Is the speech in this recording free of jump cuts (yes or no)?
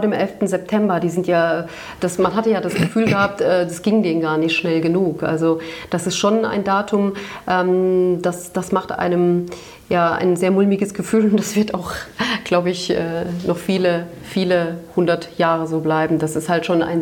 yes